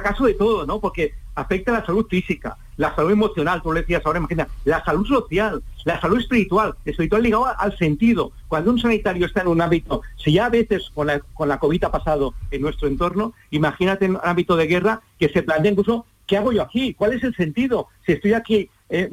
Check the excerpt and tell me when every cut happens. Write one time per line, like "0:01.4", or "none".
none